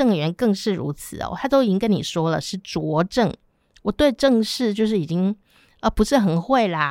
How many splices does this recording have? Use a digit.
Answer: 0